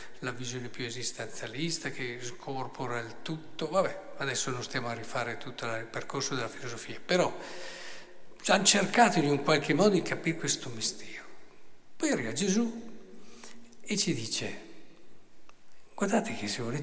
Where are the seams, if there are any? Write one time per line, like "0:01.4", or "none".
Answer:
none

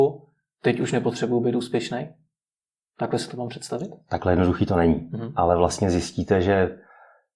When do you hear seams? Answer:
none

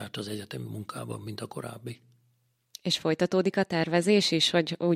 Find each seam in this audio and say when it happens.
none

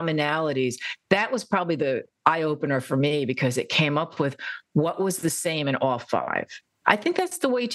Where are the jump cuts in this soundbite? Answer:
0:06.8

